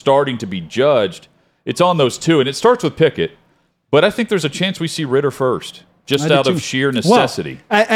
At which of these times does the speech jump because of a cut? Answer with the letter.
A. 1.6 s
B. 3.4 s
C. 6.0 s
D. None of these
C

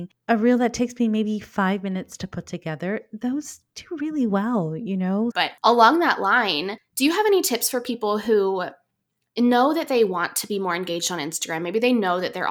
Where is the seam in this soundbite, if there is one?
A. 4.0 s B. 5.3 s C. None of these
B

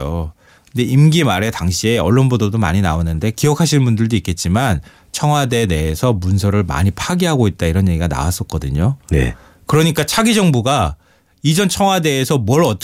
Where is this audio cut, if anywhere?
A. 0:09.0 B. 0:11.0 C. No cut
C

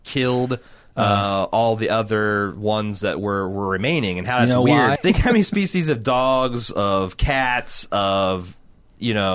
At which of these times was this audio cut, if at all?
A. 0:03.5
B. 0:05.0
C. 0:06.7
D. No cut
B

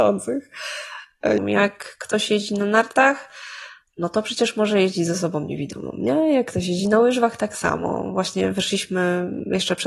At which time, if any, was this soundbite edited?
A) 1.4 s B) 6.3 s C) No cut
A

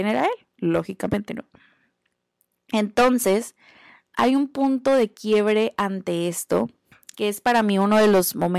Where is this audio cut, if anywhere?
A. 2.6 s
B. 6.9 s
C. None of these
C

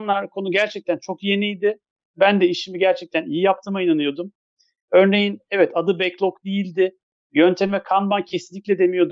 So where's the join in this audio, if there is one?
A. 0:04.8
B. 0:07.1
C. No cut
A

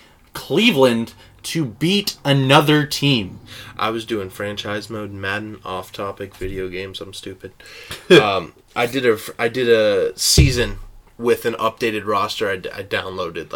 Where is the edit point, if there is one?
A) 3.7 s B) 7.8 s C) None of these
C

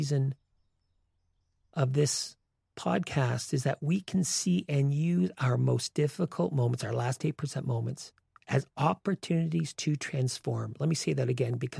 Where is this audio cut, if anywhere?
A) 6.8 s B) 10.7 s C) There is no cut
C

